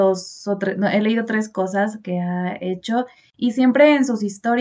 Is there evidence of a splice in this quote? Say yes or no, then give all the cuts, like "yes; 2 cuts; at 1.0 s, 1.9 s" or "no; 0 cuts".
no; 0 cuts